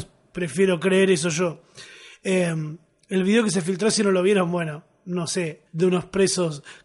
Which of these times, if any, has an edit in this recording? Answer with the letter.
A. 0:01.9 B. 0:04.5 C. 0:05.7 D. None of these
C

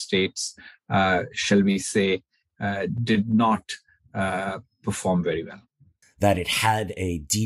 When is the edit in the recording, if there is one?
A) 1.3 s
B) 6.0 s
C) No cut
B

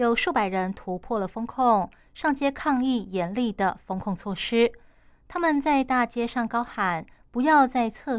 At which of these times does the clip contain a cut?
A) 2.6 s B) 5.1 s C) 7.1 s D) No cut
B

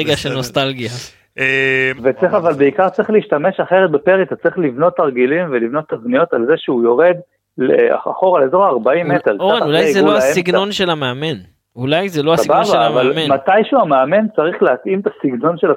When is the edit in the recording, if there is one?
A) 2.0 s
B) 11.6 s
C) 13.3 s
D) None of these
A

